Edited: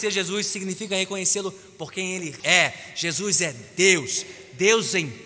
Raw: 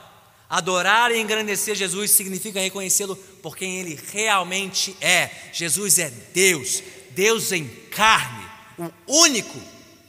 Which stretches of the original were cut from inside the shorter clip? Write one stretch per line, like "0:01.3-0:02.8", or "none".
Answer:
0:04.0-0:05.0